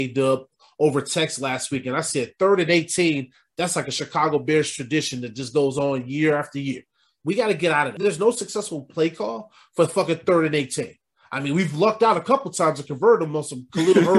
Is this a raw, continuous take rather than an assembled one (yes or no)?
yes